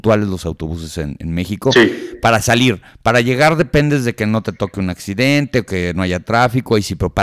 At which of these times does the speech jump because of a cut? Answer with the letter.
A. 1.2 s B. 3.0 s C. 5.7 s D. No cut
D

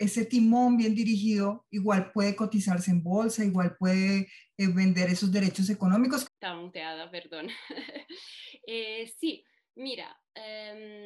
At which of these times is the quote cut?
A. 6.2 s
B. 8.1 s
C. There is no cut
A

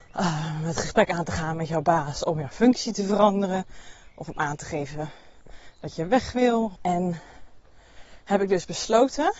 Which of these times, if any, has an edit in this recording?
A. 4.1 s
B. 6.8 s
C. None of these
B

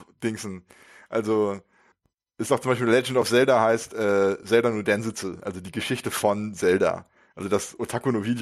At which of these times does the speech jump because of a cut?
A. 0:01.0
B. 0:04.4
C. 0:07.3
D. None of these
D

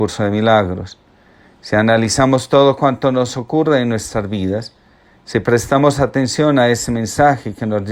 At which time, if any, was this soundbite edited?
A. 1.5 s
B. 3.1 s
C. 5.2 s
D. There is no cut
D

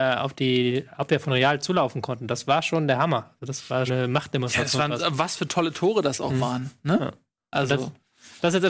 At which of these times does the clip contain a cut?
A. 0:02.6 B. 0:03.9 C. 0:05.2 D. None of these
B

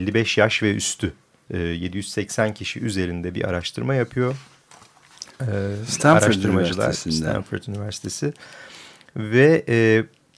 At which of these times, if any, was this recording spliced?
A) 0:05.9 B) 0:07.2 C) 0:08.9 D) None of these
D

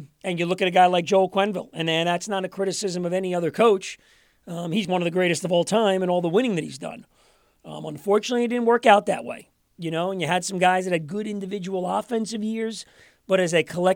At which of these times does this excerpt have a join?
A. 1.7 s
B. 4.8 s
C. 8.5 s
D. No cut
B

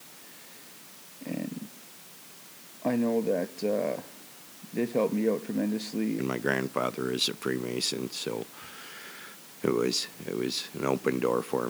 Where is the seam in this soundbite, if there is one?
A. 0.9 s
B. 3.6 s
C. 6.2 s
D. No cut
C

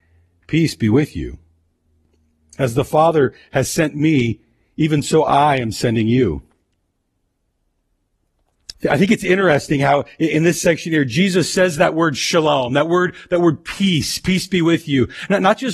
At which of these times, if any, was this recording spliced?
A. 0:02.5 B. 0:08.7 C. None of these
B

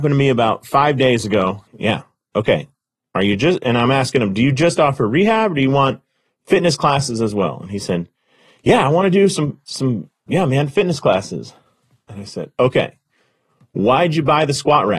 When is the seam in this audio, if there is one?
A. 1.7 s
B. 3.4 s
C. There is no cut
A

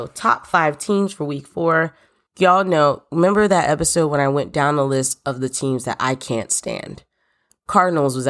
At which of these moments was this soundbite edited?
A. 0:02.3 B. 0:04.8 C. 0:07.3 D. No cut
A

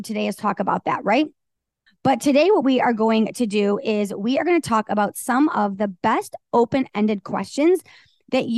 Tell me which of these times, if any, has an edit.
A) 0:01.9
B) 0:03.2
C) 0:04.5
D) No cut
A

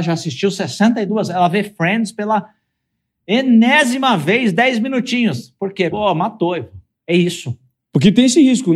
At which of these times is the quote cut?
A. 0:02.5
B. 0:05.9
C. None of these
B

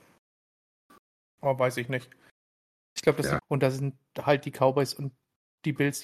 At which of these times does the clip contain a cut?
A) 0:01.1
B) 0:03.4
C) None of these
B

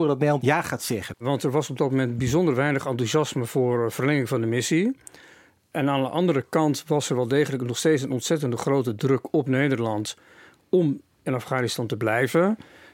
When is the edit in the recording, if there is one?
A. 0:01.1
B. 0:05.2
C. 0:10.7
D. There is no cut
A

